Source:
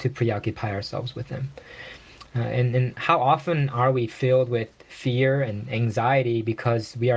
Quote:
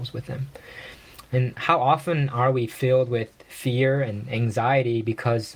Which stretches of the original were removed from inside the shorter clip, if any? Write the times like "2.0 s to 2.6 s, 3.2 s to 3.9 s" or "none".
2.3 s to 2.7 s